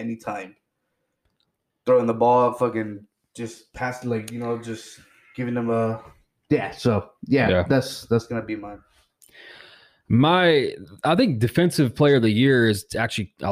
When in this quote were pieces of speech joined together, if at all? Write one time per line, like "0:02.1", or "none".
none